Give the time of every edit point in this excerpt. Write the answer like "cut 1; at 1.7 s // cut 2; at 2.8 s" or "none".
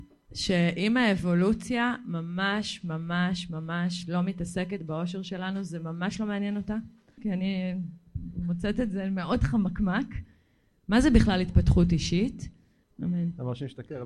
cut 1; at 7.2 s // cut 2; at 12.9 s